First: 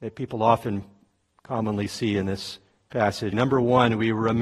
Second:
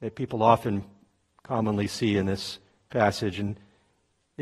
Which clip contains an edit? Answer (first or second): first